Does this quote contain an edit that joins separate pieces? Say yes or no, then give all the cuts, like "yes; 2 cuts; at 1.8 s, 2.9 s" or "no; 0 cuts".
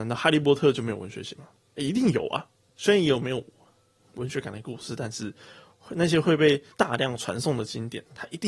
yes; 2 cuts; at 2.7 s, 6.7 s